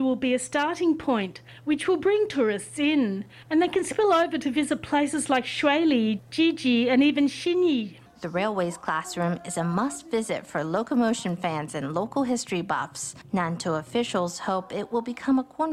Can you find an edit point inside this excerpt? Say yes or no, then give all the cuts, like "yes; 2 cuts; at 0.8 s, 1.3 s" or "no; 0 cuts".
no; 0 cuts